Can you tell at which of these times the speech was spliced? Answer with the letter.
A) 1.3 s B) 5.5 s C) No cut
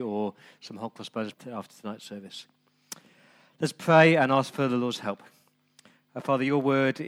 A